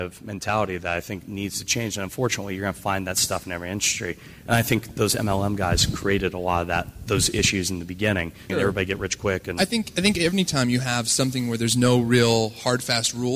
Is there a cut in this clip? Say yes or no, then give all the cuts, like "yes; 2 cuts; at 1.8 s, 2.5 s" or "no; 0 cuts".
yes; 1 cut; at 8.5 s